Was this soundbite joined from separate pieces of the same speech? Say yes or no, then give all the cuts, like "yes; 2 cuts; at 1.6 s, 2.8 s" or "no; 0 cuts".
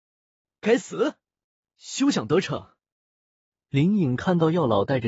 yes; 1 cut; at 1.6 s